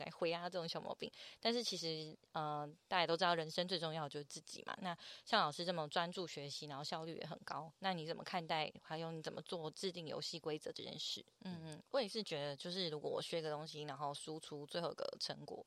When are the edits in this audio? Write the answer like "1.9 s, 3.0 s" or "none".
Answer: 11.3 s